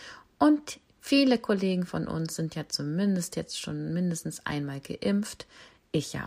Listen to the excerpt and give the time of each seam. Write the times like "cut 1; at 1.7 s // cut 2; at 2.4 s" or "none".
none